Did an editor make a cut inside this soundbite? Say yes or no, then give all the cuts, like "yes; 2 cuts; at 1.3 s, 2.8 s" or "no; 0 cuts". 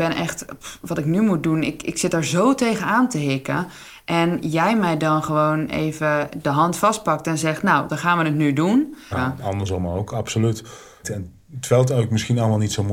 yes; 3 cuts; at 7.9 s, 9.1 s, 11.0 s